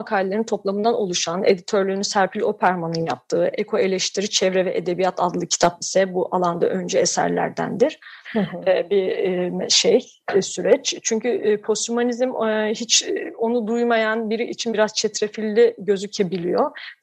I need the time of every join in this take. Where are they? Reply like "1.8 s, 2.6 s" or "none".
8.2 s